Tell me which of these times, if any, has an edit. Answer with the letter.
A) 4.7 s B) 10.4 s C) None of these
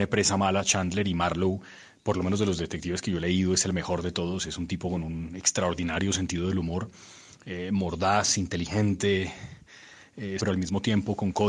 B